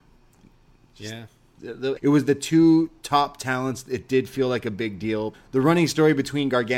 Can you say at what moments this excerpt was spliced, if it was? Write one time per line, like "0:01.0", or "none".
0:02.0
0:05.3